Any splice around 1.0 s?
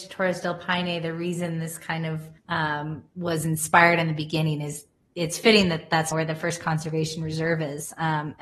no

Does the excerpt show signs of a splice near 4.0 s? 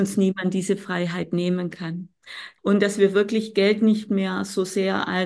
no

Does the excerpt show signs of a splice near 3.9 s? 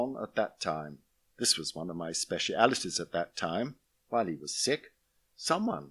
yes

